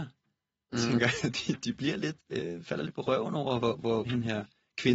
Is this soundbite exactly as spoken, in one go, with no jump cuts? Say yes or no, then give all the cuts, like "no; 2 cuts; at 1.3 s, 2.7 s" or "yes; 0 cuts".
no; 2 cuts; at 2.2 s, 4.0 s